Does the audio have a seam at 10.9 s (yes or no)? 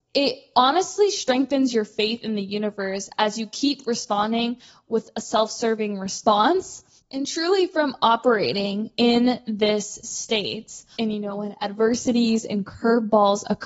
yes